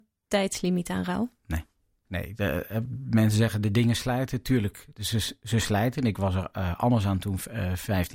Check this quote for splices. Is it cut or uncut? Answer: uncut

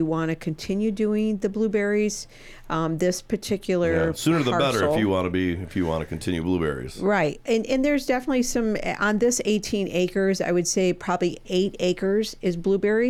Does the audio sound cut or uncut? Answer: uncut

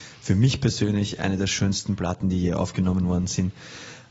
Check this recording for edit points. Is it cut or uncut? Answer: uncut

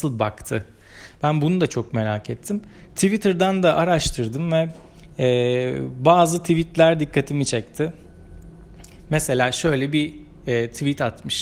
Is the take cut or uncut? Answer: uncut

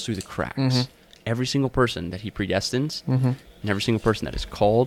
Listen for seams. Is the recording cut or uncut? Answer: cut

